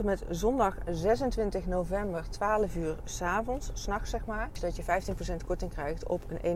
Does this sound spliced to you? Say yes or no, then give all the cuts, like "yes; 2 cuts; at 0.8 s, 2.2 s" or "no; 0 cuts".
no; 0 cuts